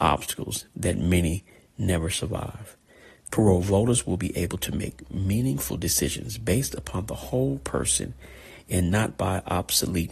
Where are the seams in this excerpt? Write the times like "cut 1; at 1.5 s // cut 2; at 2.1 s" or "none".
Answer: cut 1; at 3.3 s